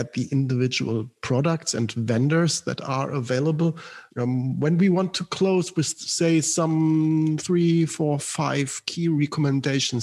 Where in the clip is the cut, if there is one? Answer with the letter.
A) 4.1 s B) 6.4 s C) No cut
A